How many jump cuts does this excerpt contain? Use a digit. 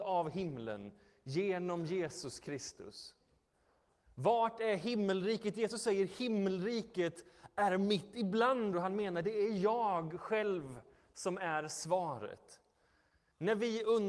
1